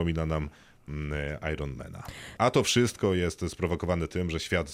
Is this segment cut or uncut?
cut